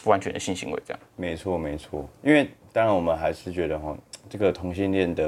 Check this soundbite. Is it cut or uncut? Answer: cut